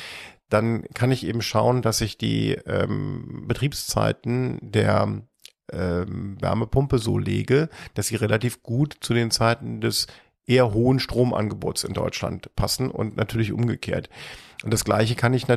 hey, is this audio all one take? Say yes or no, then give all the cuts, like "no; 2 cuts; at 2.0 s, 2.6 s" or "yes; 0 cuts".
yes; 0 cuts